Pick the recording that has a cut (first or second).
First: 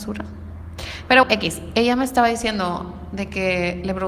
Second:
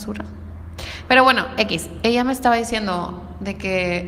first